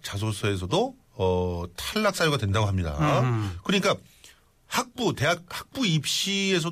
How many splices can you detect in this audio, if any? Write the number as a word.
one